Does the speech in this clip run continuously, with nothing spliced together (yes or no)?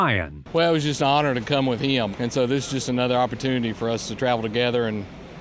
no